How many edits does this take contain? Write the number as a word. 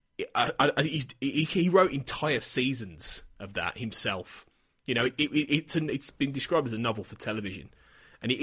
zero